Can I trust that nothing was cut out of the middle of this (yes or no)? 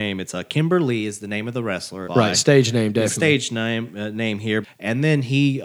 no